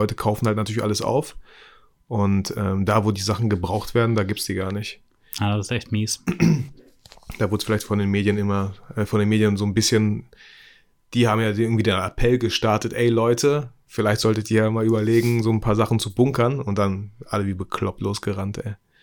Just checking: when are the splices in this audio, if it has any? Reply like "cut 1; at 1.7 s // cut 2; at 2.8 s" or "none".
none